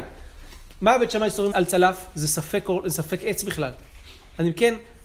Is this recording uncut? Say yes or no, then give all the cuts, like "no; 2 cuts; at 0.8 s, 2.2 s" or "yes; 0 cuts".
no; 1 cut; at 1.5 s